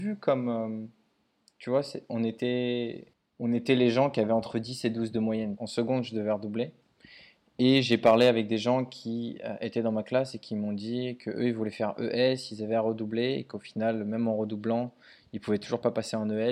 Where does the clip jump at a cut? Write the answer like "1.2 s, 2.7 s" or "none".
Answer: 5.6 s